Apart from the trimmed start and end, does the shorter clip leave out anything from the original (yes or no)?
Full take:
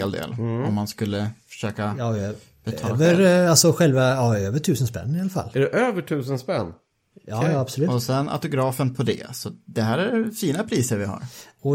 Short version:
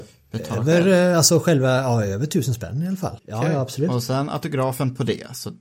yes